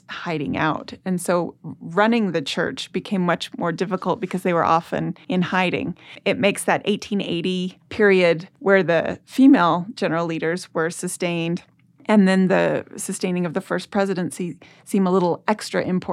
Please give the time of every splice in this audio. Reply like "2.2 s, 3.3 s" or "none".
none

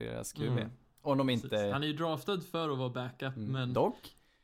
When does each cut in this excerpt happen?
none

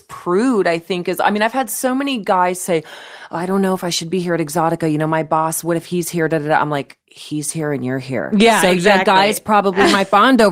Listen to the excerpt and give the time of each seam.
none

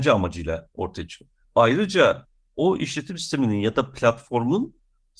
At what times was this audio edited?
1.4 s

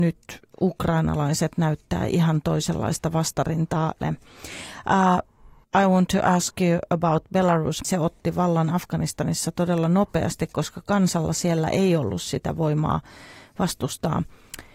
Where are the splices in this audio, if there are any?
4.0 s, 5.6 s, 7.8 s

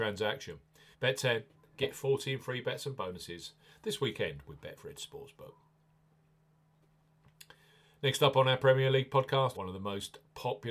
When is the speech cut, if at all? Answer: 0.9 s, 9.5 s

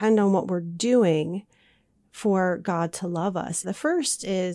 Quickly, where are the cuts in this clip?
3.6 s

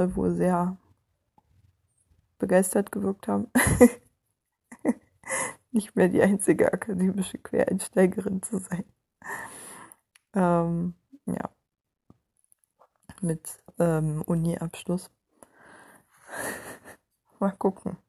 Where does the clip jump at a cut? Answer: none

